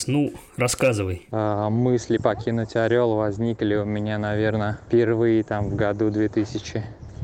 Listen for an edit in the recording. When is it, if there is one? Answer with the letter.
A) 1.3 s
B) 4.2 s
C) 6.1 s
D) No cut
A